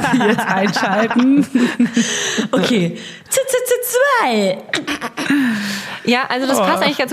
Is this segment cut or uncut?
uncut